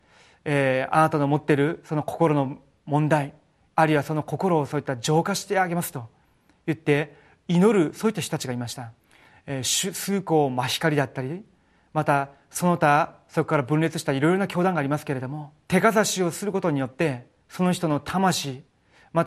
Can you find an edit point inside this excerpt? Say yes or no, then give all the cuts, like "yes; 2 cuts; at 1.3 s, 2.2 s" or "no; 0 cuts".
yes; 2 cuts; at 9.0 s, 15.6 s